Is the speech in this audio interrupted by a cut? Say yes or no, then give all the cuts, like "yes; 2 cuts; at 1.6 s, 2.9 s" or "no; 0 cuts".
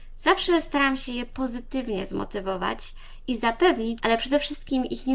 yes; 1 cut; at 4.0 s